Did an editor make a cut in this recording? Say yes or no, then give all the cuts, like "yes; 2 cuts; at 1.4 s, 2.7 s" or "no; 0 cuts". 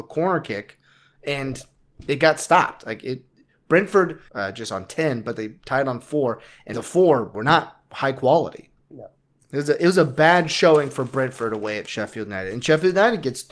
yes; 3 cuts; at 4.3 s, 6.7 s, 8.8 s